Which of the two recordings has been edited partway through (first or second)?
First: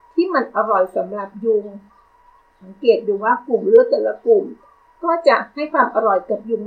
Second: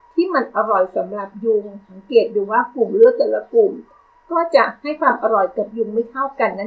second